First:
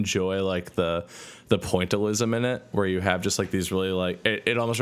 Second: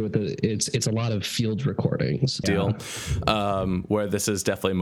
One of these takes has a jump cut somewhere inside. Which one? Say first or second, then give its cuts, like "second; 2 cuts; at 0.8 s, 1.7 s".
second; 1 cut; at 2.4 s